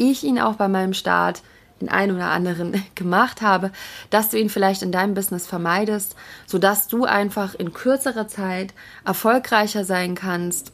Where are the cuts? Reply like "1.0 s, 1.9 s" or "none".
none